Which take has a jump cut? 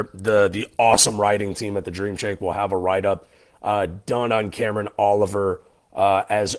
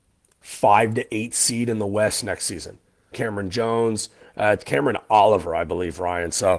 second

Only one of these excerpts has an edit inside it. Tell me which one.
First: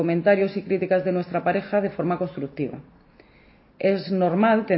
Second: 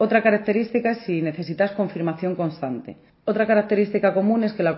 second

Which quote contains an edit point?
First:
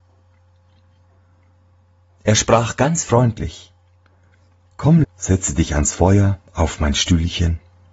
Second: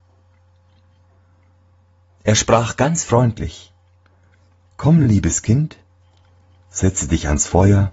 first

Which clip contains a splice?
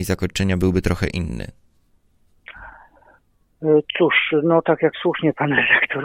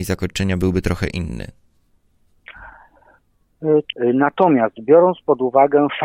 second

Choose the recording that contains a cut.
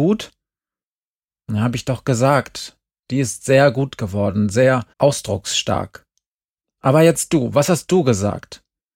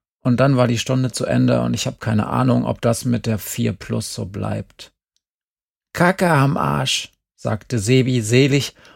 first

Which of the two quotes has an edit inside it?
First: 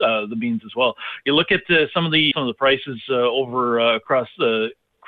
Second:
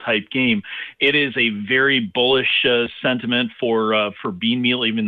first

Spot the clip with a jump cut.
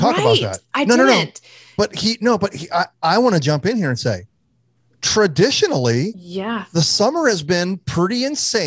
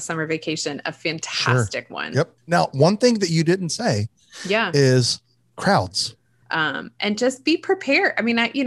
second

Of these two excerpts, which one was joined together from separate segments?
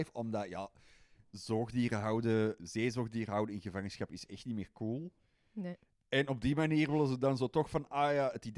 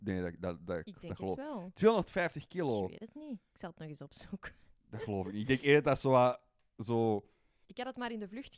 first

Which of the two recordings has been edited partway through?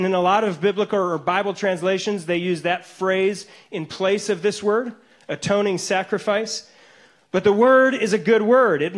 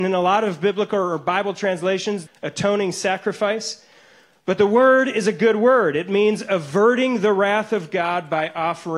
second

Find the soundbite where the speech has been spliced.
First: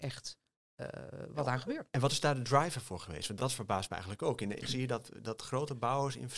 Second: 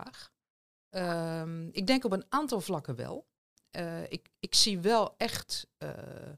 first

